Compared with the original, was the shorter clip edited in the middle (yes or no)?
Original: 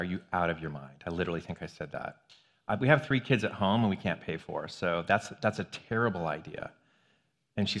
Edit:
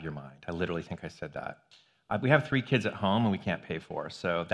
no